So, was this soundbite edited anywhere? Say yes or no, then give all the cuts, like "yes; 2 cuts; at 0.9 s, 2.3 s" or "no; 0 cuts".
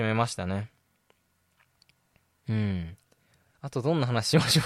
no; 0 cuts